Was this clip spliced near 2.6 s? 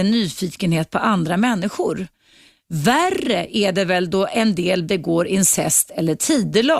no; 0 cuts

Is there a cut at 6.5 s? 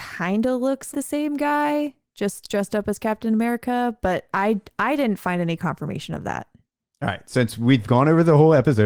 no; 1 cut; at 0.9 s

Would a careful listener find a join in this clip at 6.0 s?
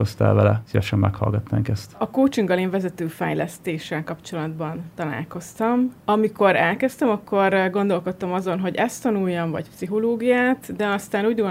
yes; 1 cut; at 6.0 s

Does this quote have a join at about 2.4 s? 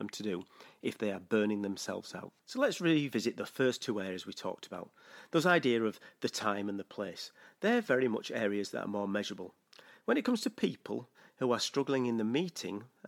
yes; 1 cut; at 2.4 s

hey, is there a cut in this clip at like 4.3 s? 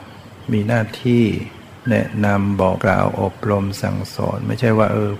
no; 1 cut; at 2.8 s

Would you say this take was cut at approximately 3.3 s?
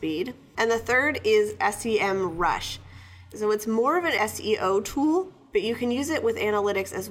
yes; 1 cut; at 3.3 s

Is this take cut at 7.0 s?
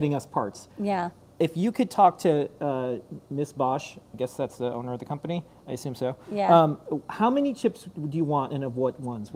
no; 0 cuts

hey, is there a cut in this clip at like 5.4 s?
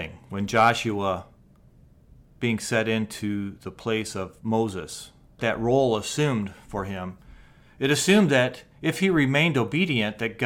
yes; 1 cut; at 5.4 s

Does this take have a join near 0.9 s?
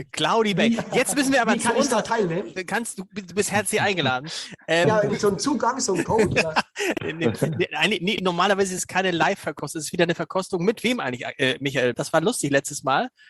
no; 2 cuts; at 5.1 s, 11.9 s

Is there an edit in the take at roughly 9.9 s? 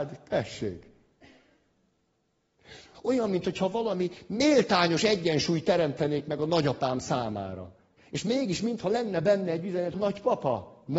yes; 3 cuts; at 2.9 s, 8.0 s, 9.9 s

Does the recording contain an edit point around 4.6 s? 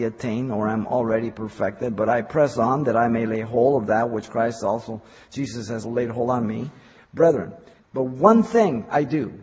no; 2 cuts; at 5.8 s, 7.8 s

